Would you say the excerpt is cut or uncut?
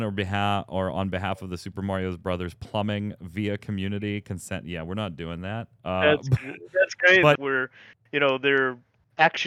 cut